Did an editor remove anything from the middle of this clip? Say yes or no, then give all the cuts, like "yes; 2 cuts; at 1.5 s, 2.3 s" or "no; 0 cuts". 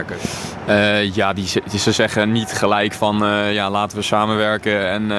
no; 0 cuts